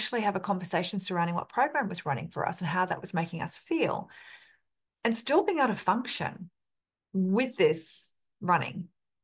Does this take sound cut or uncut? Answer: uncut